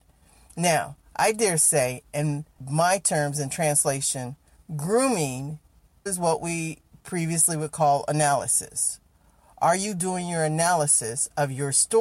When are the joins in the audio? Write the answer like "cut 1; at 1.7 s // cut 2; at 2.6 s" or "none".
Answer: cut 1; at 6.1 s